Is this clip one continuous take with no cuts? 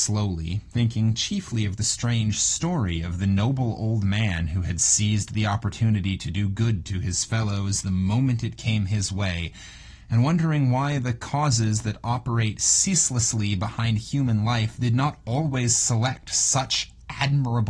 yes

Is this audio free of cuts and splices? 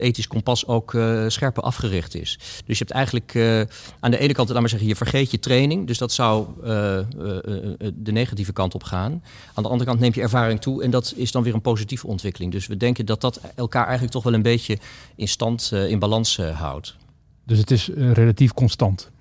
yes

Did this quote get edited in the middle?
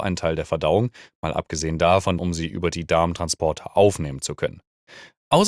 yes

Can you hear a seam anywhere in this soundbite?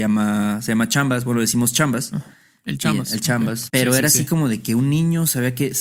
yes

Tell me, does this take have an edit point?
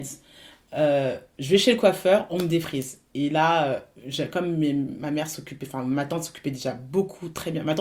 no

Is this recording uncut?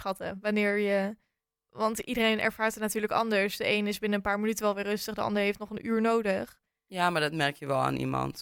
yes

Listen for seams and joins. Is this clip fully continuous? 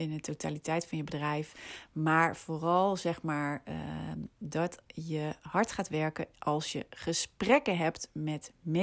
yes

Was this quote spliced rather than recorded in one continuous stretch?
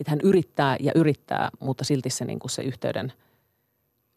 no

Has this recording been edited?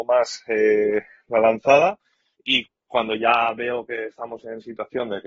no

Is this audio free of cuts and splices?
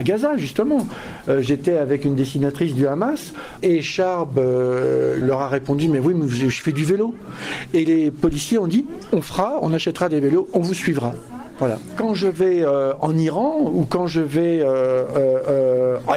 no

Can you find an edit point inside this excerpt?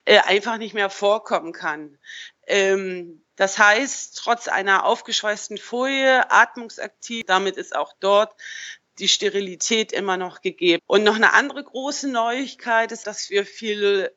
yes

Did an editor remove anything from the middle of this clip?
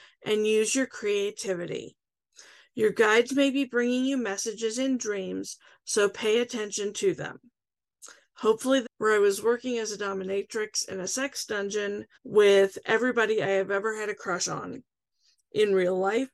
yes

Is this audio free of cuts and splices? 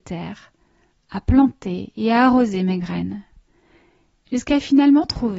yes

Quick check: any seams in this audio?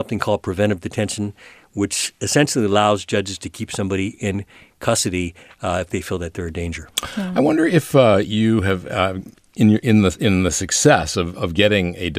no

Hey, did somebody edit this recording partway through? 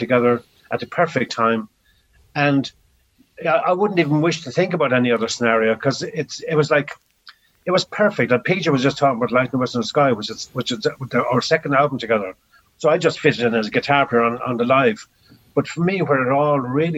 yes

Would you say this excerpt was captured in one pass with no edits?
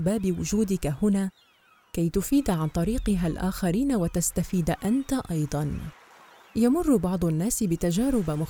yes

